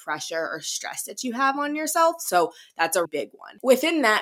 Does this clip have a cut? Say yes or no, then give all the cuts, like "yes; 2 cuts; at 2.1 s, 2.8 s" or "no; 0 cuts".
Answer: yes; 1 cut; at 3.1 s